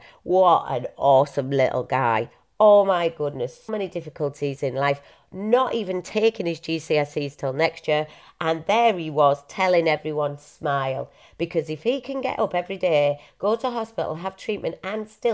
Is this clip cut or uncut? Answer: cut